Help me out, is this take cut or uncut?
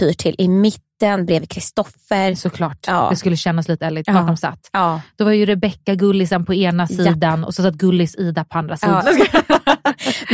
cut